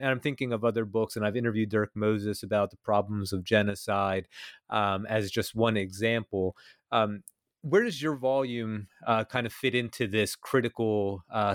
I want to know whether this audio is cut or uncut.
uncut